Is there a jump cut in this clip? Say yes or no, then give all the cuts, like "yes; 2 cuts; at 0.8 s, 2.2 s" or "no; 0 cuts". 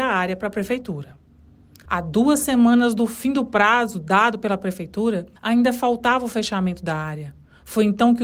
yes; 2 cuts; at 1.9 s, 5.4 s